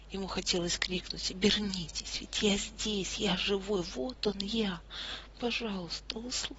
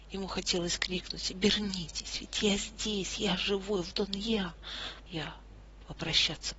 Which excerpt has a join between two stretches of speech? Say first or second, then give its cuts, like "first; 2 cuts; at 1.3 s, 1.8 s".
second; 2 cuts; at 3.9 s, 5.1 s